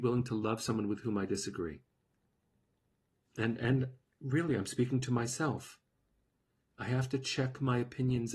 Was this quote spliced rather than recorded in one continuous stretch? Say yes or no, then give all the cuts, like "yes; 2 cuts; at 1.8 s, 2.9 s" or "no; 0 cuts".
no; 0 cuts